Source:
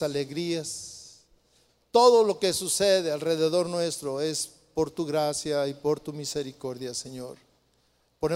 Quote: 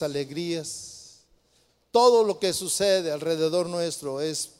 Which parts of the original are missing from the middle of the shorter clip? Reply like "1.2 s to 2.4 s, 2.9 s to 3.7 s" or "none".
none